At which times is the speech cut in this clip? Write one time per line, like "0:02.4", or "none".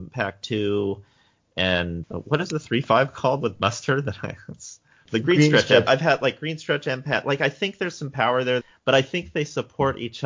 0:05.9
0:08.6